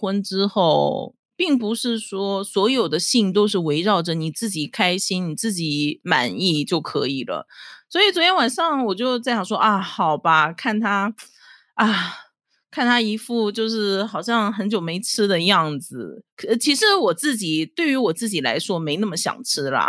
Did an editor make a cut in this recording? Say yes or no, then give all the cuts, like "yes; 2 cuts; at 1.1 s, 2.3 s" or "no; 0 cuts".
yes; 1 cut; at 7.8 s